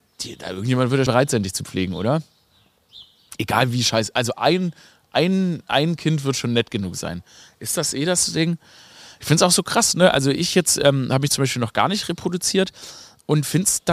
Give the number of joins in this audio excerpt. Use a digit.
1